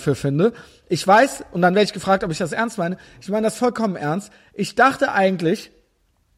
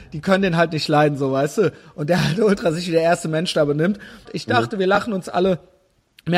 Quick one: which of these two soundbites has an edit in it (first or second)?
second